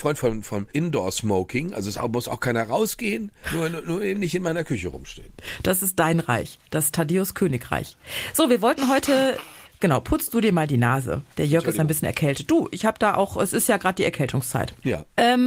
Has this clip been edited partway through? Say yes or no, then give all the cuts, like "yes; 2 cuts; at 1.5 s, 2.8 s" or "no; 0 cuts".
no; 0 cuts